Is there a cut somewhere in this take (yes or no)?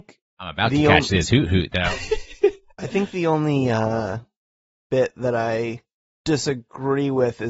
no